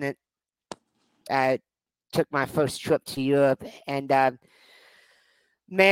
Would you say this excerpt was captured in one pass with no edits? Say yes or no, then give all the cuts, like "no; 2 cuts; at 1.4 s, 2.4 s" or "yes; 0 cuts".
no; 1 cut; at 1.3 s